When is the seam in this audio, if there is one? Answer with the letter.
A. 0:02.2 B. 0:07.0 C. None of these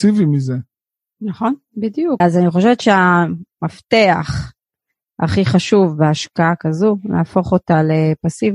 A